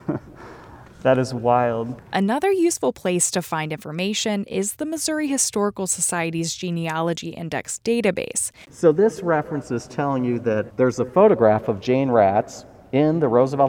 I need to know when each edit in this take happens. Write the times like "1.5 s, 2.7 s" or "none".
8.6 s, 10.7 s